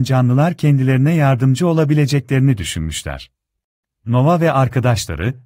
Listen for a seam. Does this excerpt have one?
yes; 1 cut; at 3.8 s

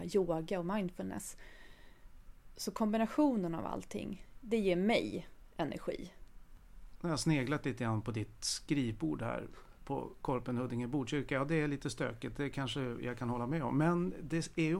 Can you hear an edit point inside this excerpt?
no; 0 cuts

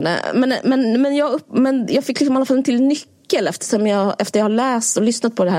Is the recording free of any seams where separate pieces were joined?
yes; 0 cuts

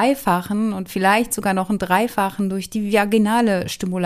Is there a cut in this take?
no; 0 cuts

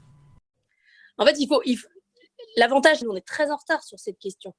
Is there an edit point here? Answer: yes; 1 cut; at 3.0 s

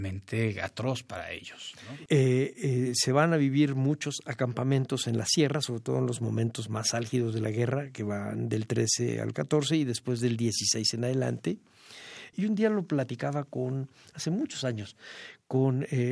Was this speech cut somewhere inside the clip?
yes; 2 cuts; at 2.1 s, 12.3 s

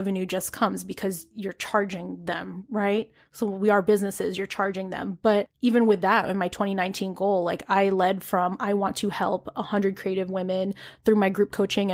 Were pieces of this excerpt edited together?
no; 0 cuts

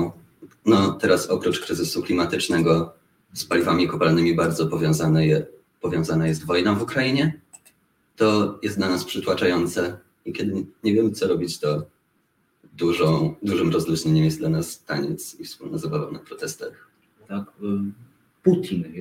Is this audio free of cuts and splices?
no; 1 cut; at 17.3 s

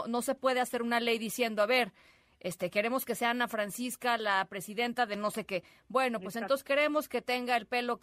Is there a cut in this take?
no; 0 cuts

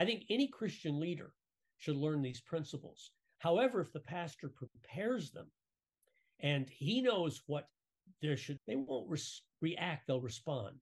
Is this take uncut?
no; 2 cuts; at 3.4 s, 8.6 s

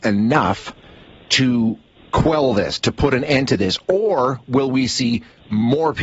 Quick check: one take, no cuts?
yes; 0 cuts

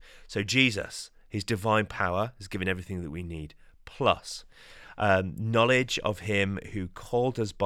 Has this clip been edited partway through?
no; 0 cuts

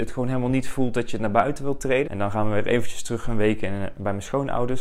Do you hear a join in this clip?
yes; 1 cut; at 2.1 s

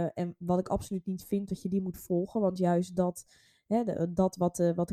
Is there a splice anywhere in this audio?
no; 0 cuts

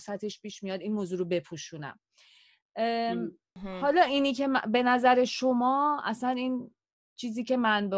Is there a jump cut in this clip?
no; 0 cuts

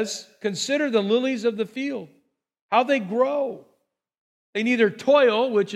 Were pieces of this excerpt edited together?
no; 0 cuts

